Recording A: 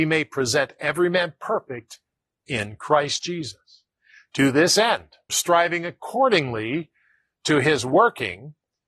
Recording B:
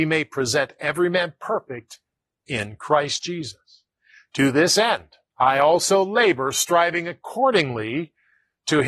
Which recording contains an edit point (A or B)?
A